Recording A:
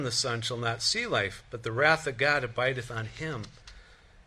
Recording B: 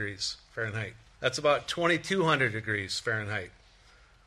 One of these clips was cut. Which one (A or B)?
B